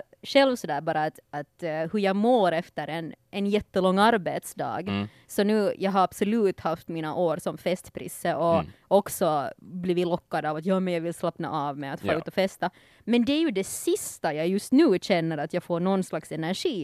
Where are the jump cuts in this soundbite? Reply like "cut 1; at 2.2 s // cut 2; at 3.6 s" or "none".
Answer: none